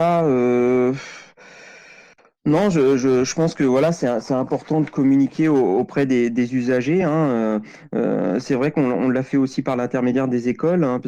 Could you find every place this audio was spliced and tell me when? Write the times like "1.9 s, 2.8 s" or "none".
none